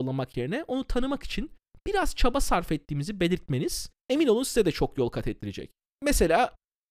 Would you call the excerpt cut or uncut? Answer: cut